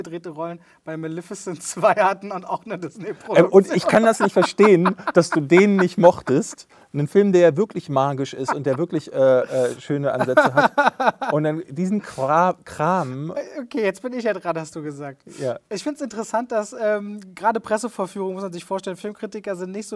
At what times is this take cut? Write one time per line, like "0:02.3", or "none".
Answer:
none